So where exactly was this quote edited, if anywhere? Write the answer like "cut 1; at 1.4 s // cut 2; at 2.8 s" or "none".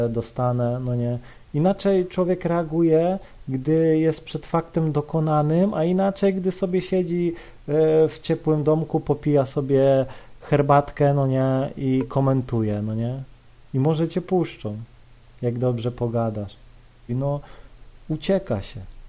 cut 1; at 13.6 s // cut 2; at 17.1 s